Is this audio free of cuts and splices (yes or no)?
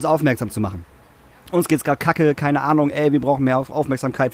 yes